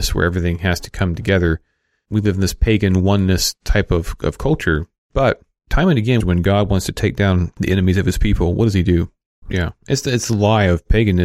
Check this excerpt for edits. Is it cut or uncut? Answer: cut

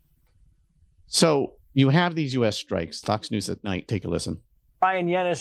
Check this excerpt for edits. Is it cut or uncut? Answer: cut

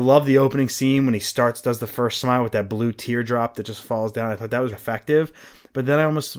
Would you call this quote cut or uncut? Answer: cut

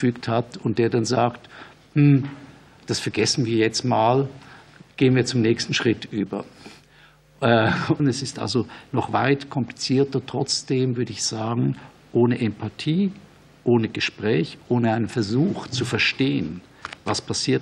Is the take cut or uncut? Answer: cut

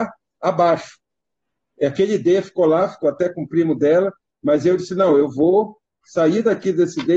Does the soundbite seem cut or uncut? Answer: uncut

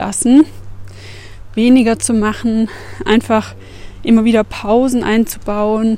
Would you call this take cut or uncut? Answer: uncut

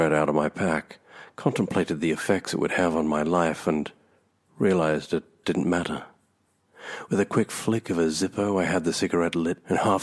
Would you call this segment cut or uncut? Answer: cut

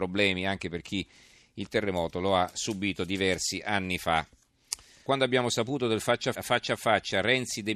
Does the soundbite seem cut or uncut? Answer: cut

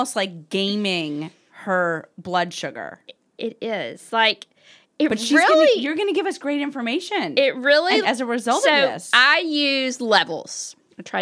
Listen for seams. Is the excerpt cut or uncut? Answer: cut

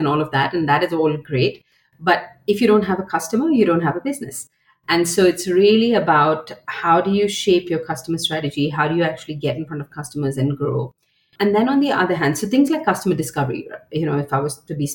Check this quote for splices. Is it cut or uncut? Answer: uncut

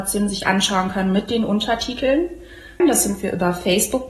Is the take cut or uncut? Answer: cut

